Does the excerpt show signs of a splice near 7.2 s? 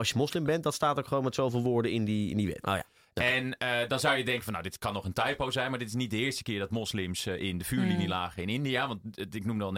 no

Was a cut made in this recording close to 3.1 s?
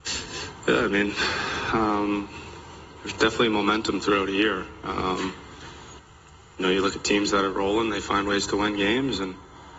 no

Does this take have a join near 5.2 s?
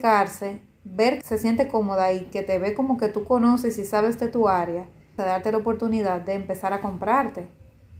yes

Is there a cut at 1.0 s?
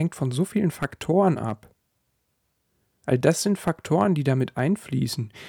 no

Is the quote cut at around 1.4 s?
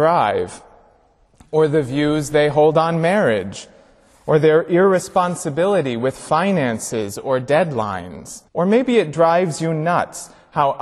no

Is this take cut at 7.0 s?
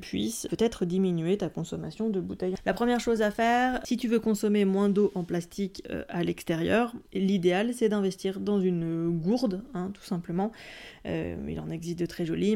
yes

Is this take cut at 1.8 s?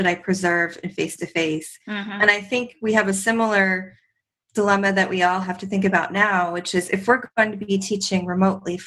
no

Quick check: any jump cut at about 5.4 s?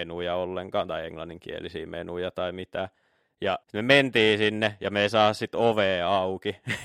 no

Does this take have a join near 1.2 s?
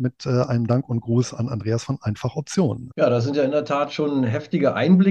no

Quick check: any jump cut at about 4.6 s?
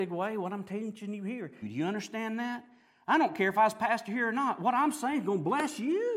no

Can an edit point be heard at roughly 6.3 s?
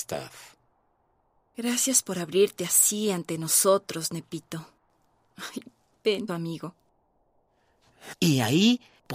yes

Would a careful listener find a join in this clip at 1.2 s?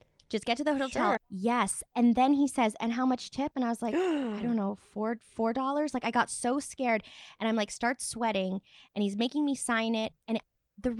yes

